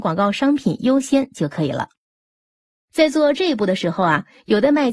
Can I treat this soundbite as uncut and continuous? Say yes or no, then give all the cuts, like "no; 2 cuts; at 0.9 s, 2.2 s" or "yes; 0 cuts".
yes; 0 cuts